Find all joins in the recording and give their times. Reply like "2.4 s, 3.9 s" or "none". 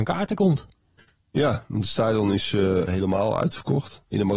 2.9 s